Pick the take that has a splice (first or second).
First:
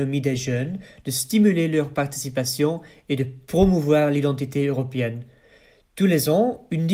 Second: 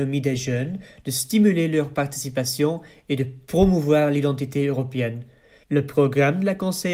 second